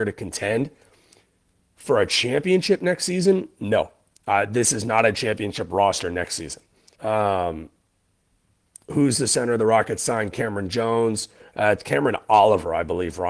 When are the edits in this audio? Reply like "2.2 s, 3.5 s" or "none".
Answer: 7.0 s